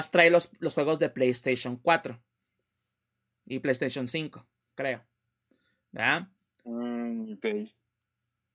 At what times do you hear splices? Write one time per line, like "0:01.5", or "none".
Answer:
none